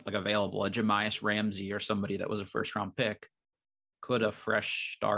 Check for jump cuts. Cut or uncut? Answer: uncut